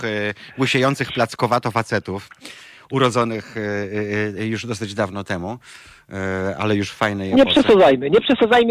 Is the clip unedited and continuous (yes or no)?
yes